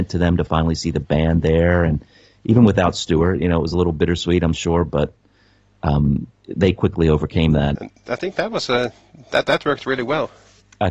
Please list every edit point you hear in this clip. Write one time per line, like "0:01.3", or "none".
0:07.7